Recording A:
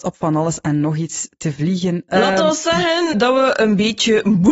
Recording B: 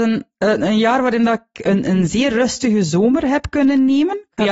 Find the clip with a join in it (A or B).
A